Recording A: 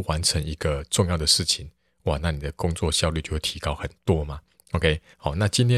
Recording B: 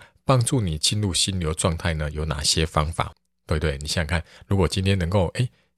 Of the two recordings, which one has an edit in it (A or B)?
B